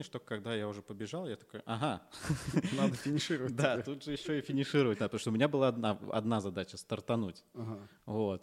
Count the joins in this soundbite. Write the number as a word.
zero